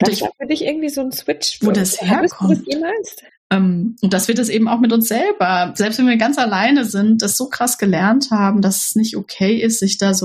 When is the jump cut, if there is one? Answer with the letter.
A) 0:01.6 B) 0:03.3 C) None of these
B